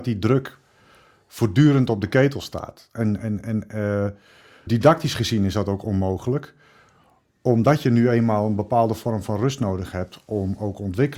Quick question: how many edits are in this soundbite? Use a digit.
1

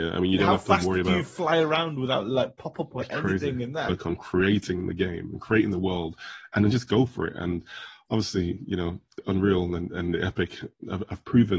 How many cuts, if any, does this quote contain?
1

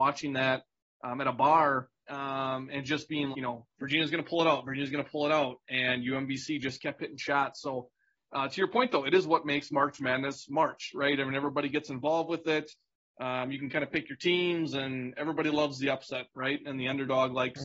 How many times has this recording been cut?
1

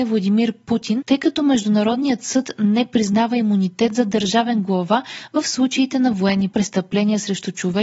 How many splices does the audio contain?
1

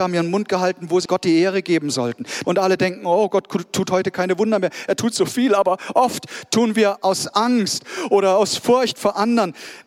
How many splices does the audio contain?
2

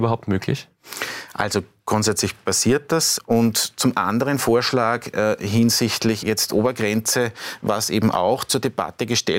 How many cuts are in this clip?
2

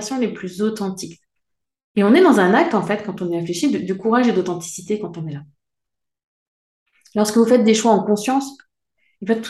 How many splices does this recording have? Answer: 0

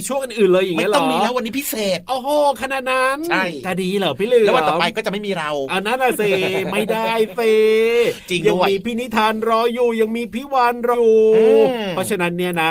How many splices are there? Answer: 1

